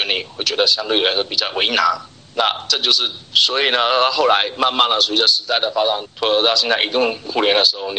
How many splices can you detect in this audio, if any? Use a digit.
2